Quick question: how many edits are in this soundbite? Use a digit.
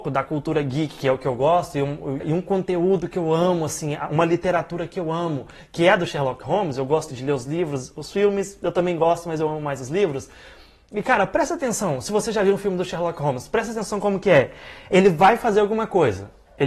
2